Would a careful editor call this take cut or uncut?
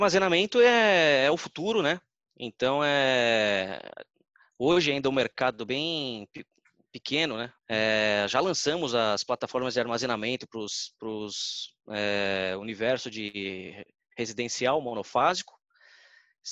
cut